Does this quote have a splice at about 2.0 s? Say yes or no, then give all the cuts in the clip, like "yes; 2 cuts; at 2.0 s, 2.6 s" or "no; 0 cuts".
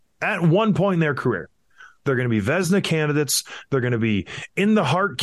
yes; 1 cut; at 2.0 s